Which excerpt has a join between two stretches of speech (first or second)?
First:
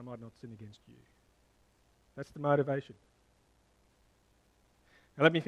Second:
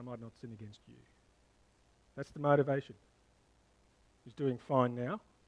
second